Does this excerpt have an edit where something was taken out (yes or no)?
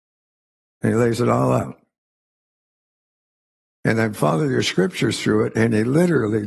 no